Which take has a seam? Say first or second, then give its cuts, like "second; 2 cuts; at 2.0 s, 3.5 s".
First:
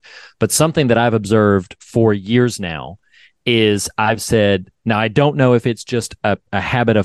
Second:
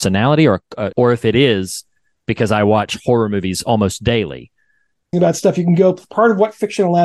second; 2 cuts; at 0.9 s, 5.1 s